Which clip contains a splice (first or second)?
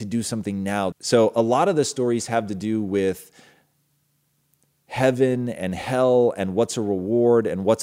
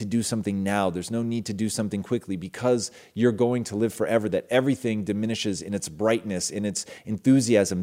first